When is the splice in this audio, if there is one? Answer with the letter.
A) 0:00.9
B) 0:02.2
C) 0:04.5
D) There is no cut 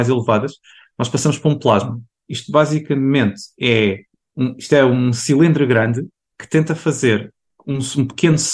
B